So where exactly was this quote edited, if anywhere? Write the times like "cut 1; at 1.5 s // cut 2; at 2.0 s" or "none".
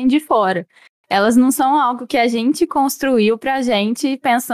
none